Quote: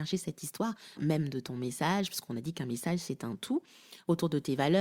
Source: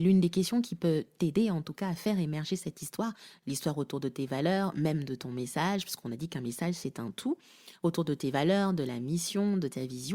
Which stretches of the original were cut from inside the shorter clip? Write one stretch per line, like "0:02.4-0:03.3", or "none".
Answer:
0:03.4-0:04.7